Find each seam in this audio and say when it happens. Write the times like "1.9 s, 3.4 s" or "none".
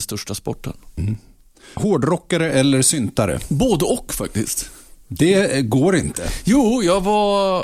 1.8 s